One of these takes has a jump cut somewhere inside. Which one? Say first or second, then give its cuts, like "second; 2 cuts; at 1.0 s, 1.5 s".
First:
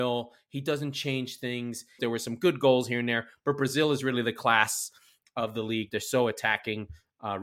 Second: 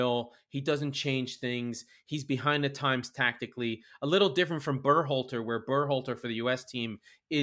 first; 2 cuts; at 2.0 s, 5.9 s